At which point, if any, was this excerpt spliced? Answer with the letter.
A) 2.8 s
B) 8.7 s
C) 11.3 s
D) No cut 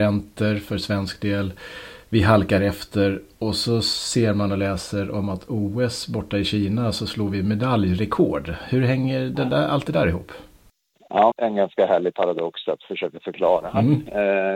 C